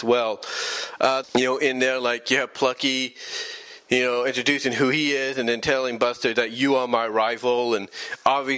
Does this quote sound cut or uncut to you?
cut